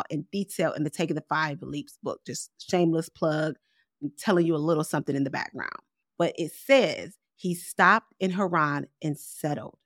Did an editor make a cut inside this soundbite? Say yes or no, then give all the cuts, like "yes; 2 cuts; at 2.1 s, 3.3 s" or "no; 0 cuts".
yes; 1 cut; at 6.0 s